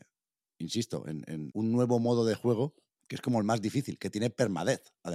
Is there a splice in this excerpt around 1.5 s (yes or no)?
yes